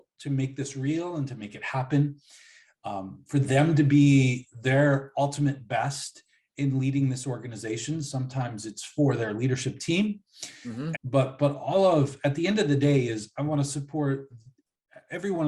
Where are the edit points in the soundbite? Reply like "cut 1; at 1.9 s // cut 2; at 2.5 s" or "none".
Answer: cut 1; at 10.9 s